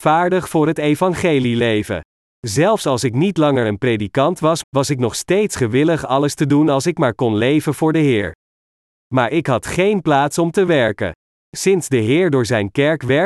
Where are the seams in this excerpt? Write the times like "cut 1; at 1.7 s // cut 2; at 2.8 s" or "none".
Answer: cut 1; at 4.6 s

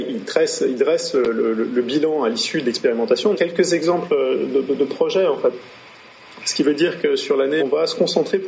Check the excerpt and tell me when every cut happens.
cut 1; at 3.3 s // cut 2; at 6.4 s // cut 3; at 7.6 s

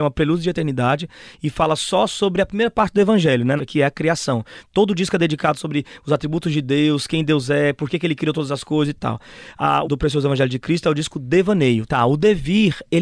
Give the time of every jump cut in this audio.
cut 1; at 3.6 s // cut 2; at 9.8 s // cut 3; at 11.9 s

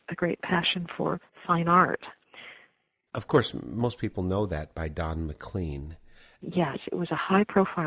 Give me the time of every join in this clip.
cut 1; at 3.1 s

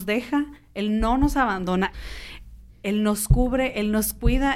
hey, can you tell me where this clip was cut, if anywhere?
cut 1; at 1.9 s

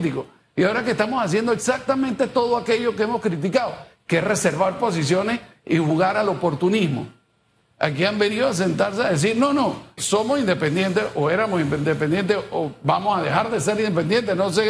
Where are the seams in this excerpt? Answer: cut 1; at 7.7 s // cut 2; at 10.0 s

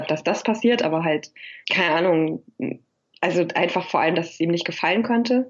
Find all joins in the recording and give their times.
cut 1; at 1.6 s

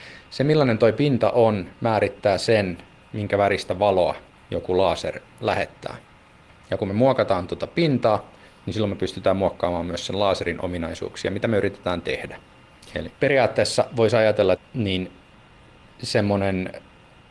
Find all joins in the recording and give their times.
cut 1; at 13.1 s // cut 2; at 14.5 s

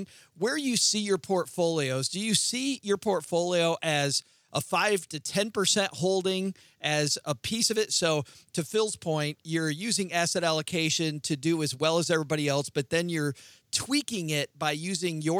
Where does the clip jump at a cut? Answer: none

